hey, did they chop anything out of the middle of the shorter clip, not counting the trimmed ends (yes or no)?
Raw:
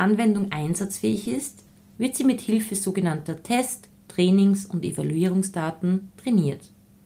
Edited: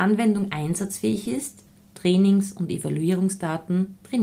yes